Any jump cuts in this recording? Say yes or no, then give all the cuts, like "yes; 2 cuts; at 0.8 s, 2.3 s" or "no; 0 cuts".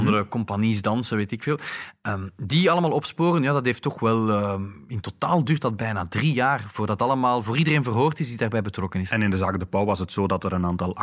no; 0 cuts